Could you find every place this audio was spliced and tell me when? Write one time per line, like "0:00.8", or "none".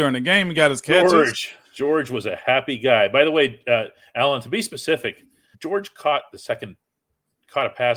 0:05.5